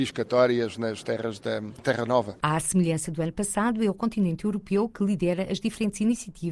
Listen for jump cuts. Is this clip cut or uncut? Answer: uncut